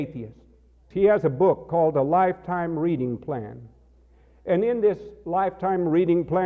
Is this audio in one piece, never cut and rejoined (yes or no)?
no